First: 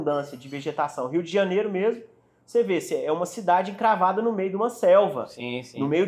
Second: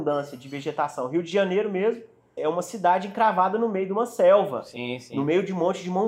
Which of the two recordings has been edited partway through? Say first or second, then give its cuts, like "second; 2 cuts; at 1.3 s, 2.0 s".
second; 1 cut; at 2.4 s